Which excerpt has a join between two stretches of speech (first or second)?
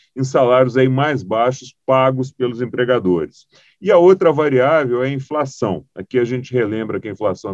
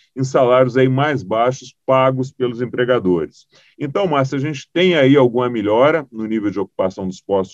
second